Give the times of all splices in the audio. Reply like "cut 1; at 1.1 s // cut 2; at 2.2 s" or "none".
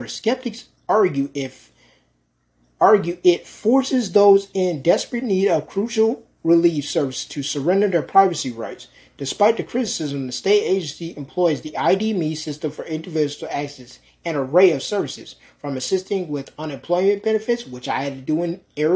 none

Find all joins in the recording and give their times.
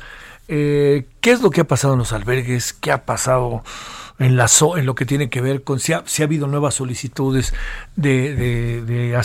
none

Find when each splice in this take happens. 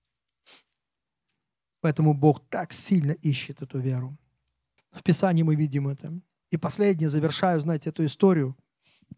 cut 1; at 4.8 s // cut 2; at 6.4 s

